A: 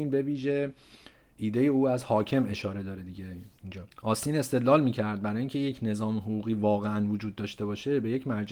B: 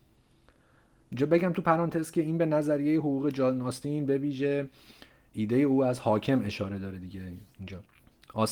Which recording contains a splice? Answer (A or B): A